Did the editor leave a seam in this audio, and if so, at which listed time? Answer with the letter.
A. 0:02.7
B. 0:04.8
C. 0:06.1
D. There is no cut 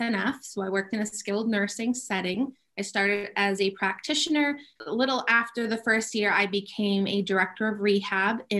B